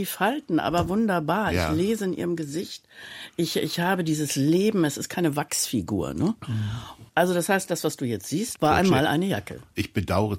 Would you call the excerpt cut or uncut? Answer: cut